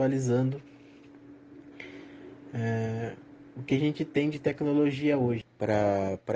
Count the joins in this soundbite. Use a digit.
1